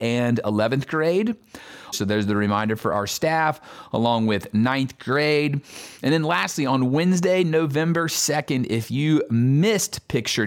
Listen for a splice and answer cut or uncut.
cut